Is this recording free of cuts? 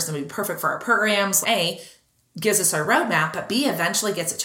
no; 1 cut; at 1.4 s

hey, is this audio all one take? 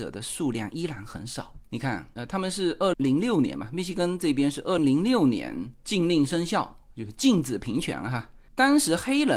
no; 2 cuts; at 2.9 s, 4.8 s

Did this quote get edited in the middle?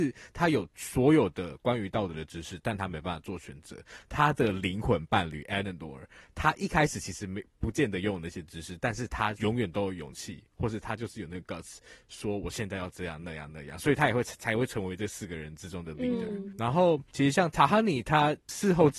no; 0 cuts

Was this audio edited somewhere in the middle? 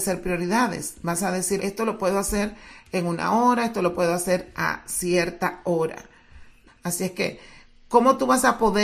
yes; 2 cuts; at 1.6 s, 6.7 s

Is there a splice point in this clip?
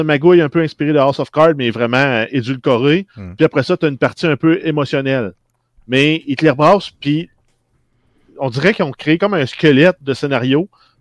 no; 0 cuts

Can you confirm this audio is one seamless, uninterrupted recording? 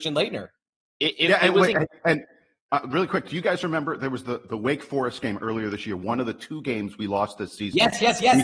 yes; 0 cuts

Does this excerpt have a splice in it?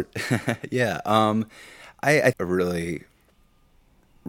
yes; 1 cut; at 2.3 s

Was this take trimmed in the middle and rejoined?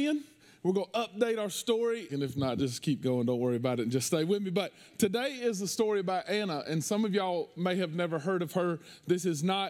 yes; 1 cut; at 2.1 s

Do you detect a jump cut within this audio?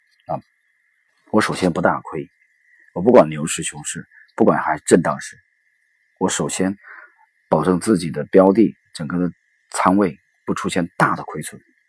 yes; 1 cut; at 1.1 s

